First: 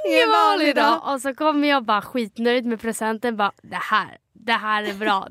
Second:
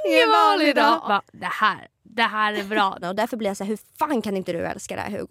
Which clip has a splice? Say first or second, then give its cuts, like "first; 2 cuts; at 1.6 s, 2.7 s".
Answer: second; 2 cuts; at 1.1 s, 3.0 s